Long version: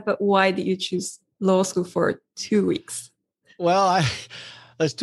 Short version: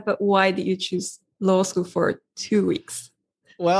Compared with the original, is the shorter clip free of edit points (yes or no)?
yes